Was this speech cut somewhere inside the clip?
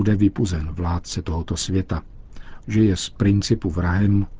yes; 1 cut; at 2.6 s

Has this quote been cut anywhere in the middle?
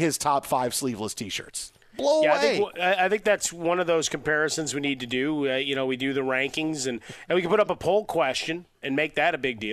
yes; 1 cut; at 8.7 s

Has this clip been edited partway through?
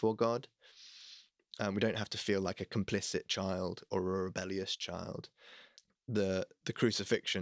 no; 0 cuts

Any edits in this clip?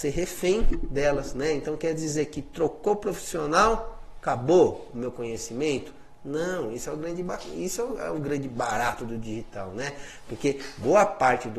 no; 0 cuts

